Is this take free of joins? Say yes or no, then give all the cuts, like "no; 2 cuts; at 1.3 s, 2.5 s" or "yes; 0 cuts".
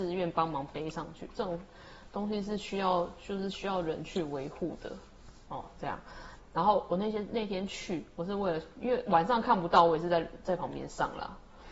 no; 1 cut; at 6.4 s